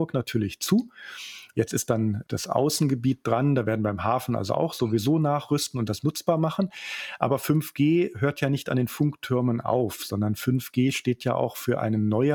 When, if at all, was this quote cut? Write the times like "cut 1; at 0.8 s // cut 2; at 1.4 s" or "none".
cut 1; at 1.5 s